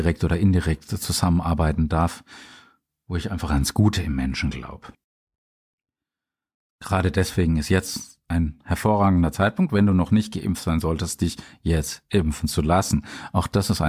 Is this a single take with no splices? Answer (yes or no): yes